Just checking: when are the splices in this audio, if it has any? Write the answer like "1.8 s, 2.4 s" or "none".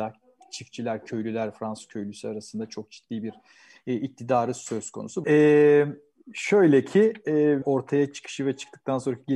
5.2 s, 7.6 s